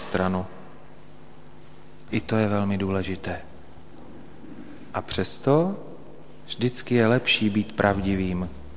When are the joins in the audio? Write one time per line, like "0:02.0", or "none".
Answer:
0:02.1
0:04.9